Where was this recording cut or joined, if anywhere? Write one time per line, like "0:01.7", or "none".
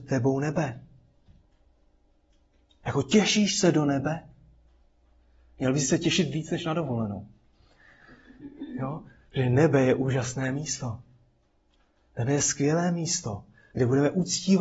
none